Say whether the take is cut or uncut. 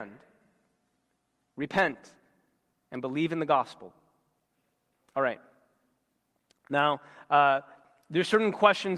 uncut